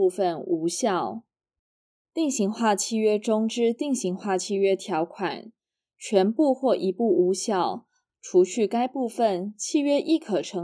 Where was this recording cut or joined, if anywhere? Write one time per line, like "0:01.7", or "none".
0:02.0
0:08.1